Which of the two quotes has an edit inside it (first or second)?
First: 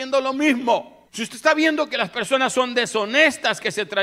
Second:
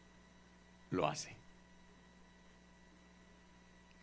first